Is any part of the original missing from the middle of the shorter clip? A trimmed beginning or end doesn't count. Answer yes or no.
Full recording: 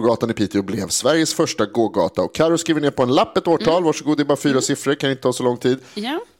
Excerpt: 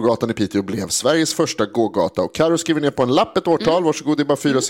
no